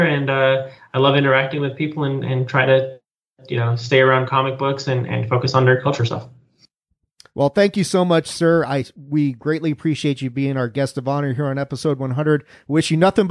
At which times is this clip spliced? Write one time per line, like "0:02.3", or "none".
none